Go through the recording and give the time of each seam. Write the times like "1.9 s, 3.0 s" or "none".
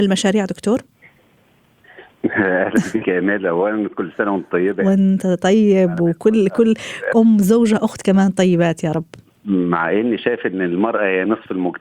7.1 s